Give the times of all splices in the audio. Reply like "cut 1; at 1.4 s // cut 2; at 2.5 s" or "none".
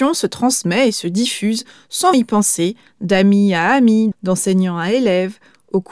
cut 1; at 2.1 s // cut 2; at 4.1 s

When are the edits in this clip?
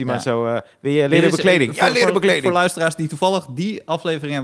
none

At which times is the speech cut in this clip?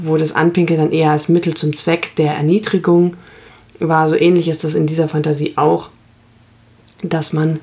none

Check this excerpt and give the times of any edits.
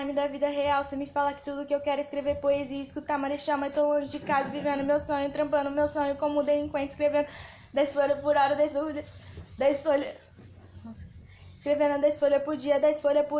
none

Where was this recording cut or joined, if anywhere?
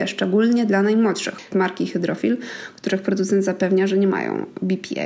cut 1; at 1.5 s

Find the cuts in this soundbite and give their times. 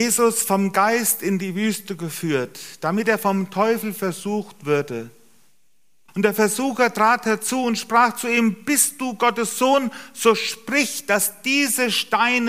cut 1; at 6.1 s

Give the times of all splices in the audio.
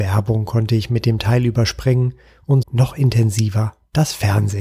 cut 1; at 2.6 s

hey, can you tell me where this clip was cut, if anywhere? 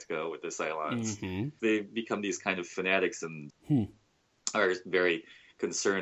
cut 1; at 1.6 s // cut 2; at 3.5 s

